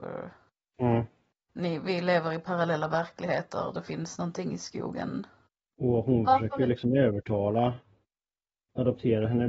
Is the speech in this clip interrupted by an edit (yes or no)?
yes